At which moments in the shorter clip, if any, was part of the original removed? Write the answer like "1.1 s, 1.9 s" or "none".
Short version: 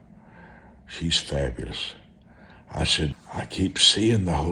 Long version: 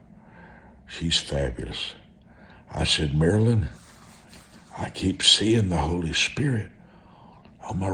3.1 s